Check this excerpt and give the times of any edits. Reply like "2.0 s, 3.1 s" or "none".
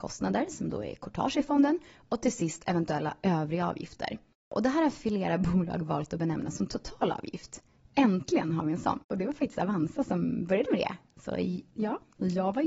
none